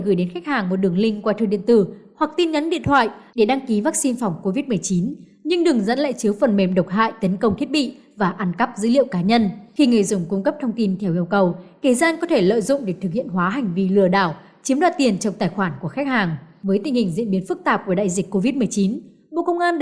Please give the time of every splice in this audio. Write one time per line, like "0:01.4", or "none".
none